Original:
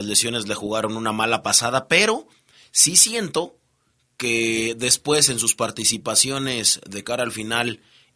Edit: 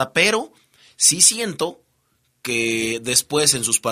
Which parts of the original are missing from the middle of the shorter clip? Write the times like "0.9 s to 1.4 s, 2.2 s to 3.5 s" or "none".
none